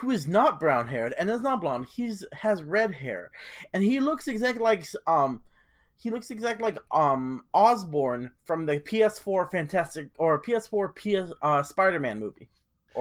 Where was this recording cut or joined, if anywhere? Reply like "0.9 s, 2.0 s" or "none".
none